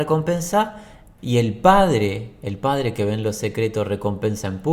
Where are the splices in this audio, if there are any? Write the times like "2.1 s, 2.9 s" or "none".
1.2 s